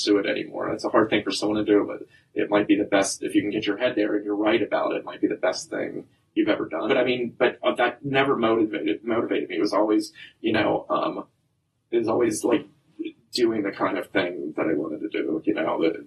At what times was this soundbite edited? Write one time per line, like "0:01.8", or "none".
0:06.9